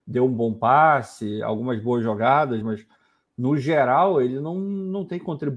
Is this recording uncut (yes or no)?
yes